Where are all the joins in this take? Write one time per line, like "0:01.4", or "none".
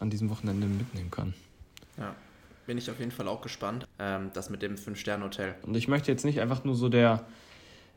0:03.8
0:05.6